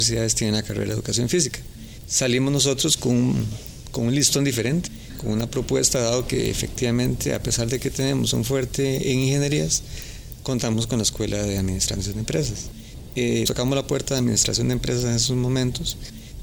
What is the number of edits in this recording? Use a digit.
1